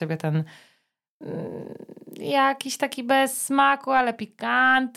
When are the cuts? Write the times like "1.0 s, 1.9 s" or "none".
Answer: none